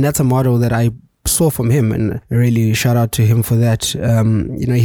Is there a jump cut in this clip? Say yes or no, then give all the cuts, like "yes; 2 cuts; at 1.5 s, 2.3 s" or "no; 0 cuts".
no; 0 cuts